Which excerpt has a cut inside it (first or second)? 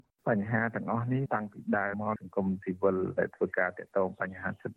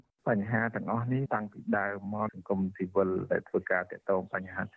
first